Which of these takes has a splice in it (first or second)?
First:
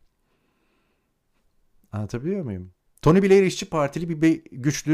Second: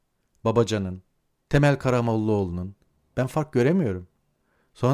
second